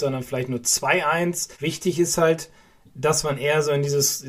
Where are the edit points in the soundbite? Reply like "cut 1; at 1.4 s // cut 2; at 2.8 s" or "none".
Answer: cut 1; at 1.5 s